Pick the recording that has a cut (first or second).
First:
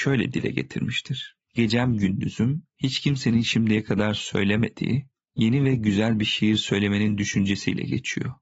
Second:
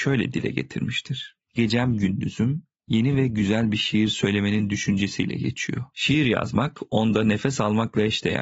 second